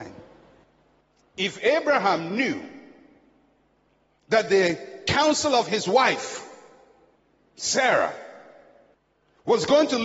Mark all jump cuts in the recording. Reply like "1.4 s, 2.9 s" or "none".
none